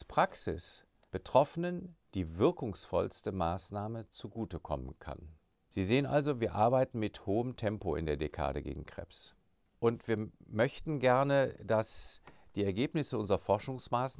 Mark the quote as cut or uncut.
uncut